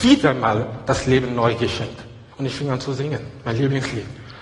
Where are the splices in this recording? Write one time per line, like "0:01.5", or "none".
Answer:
0:02.3